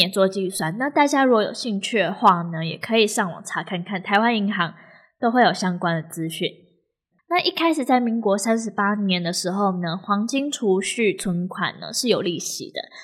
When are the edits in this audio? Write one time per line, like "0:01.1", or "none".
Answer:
0:07.1